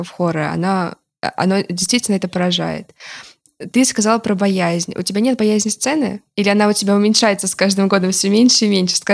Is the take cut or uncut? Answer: uncut